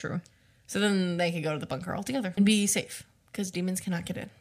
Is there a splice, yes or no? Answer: yes